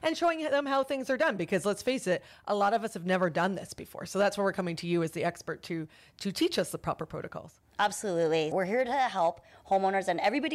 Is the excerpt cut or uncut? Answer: cut